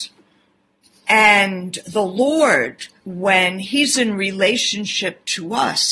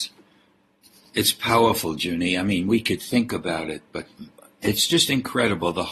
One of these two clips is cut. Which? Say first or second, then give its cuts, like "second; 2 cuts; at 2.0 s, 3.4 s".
first; 2 cuts; at 1.1 s, 3.0 s